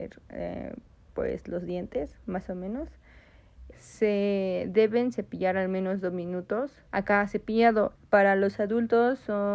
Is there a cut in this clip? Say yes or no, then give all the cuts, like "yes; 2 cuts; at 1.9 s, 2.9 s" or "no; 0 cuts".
yes; 3 cuts; at 3.7 s, 6.9 s, 7.9 s